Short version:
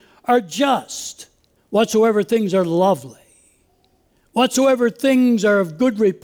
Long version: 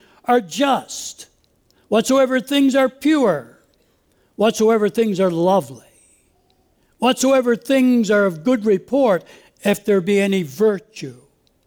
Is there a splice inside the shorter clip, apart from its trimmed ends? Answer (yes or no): yes